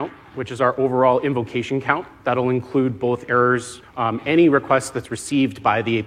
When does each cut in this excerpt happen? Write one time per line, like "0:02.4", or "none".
0:03.8